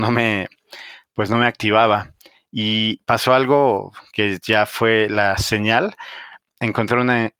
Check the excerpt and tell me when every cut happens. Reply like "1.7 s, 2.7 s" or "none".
none